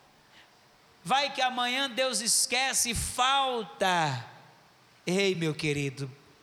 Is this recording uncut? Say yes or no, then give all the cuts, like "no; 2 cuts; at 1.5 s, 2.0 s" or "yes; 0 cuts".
yes; 0 cuts